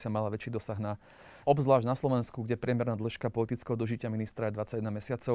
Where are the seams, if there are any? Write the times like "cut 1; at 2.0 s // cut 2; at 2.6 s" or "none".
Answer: cut 1; at 1.4 s